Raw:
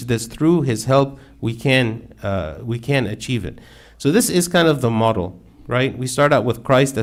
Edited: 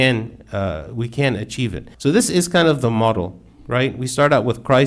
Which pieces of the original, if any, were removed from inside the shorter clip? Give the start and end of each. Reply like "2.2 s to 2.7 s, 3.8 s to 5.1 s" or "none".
3.6 s to 3.9 s